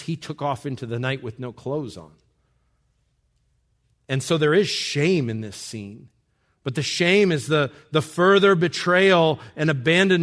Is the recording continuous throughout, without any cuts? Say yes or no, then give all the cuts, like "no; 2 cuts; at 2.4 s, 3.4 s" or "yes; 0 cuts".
yes; 0 cuts